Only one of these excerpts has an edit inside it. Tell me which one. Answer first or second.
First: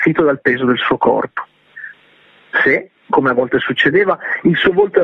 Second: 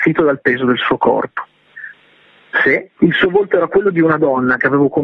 second